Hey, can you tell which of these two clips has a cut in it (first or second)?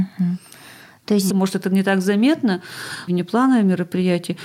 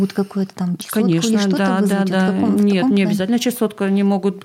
first